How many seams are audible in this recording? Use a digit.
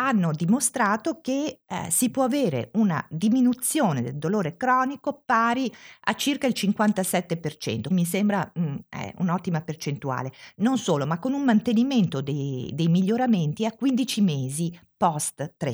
1